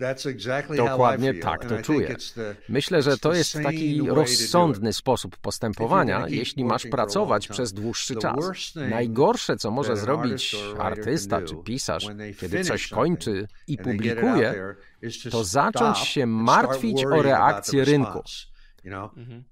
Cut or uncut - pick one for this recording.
uncut